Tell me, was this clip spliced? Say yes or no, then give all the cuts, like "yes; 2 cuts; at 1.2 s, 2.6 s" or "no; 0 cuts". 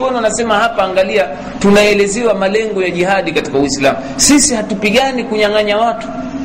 no; 0 cuts